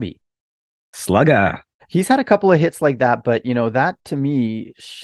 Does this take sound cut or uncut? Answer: cut